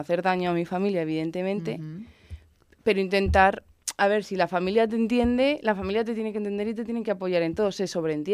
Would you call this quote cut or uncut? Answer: uncut